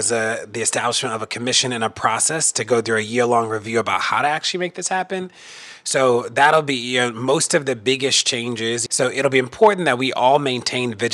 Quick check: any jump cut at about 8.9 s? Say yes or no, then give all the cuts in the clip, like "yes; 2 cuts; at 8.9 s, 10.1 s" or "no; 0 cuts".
yes; 1 cut; at 8.9 s